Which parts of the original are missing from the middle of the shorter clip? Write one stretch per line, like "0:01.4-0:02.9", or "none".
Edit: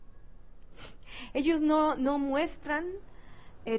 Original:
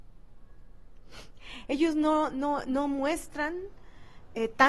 0:02.3-0:02.7